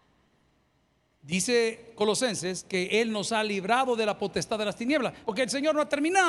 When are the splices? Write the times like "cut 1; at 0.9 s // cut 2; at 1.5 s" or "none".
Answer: cut 1; at 5.2 s